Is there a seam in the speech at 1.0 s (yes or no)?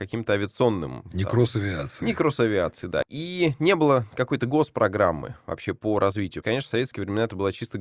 no